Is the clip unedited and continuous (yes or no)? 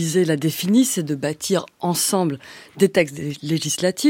yes